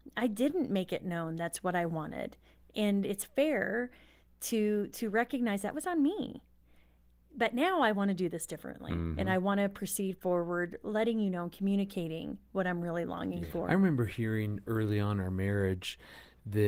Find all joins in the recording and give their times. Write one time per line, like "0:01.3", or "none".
none